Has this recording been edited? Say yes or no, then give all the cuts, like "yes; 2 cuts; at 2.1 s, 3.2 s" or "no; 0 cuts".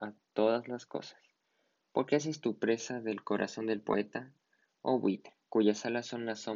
no; 0 cuts